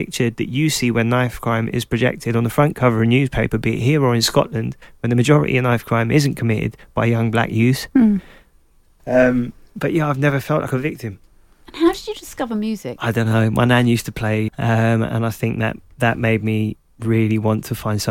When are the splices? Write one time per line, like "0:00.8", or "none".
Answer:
0:09.0
0:14.5

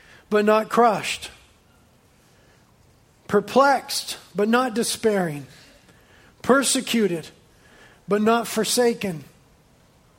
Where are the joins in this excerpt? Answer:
none

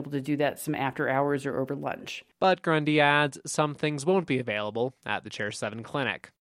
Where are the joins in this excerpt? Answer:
none

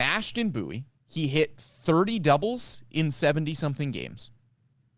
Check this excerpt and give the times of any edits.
0:01.6

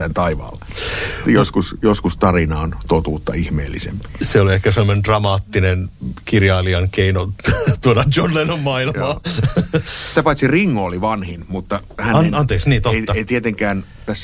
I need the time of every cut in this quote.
none

